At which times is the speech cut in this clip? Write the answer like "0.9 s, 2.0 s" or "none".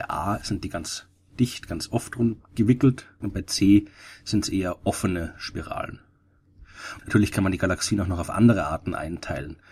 3.2 s, 7.0 s